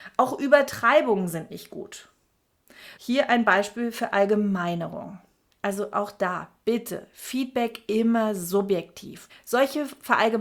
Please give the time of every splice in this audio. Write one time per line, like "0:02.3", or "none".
0:03.0
0:05.5
0:09.3